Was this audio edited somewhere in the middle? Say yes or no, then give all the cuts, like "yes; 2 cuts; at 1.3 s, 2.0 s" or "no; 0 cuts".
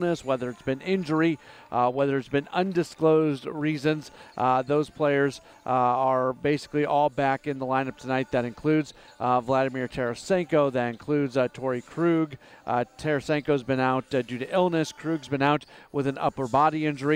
no; 0 cuts